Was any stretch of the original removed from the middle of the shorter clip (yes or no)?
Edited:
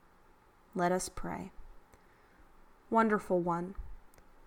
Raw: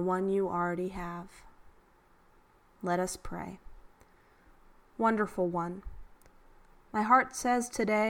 no